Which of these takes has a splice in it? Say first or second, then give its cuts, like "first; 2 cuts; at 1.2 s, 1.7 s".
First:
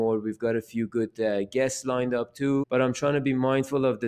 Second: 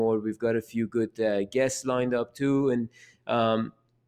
first; 1 cut; at 2.6 s